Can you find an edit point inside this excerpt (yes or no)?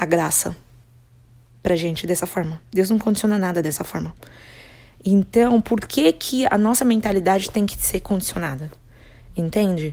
no